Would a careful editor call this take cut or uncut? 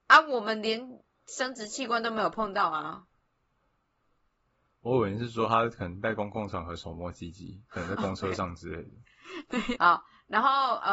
cut